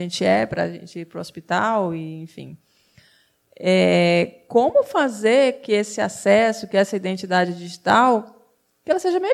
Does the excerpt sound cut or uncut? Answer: uncut